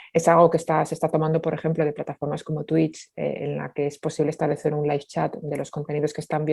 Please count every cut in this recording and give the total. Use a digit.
0